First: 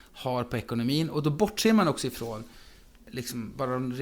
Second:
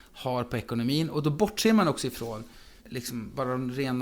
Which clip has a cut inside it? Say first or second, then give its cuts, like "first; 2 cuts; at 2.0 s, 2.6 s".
second; 1 cut; at 2.8 s